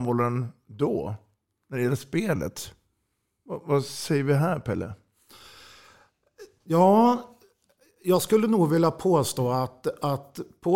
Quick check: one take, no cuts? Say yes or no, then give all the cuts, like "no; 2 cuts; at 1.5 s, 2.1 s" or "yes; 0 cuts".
yes; 0 cuts